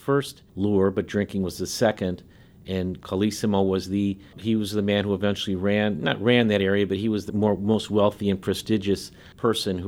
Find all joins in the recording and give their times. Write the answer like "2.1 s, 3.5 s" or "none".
7.3 s